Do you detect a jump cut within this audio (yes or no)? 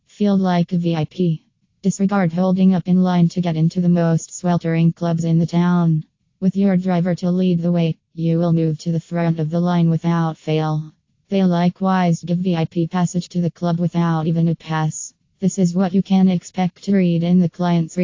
no